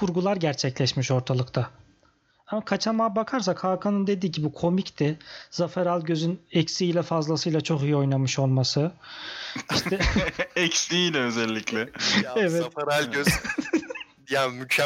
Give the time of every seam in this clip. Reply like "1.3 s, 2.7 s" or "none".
none